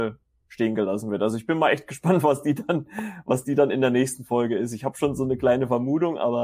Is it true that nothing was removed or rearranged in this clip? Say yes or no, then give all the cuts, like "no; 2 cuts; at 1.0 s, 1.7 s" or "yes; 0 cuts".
yes; 0 cuts